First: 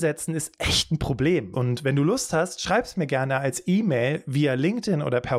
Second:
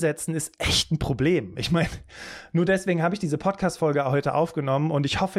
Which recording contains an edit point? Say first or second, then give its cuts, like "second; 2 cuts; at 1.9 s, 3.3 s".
first; 1 cut; at 1.5 s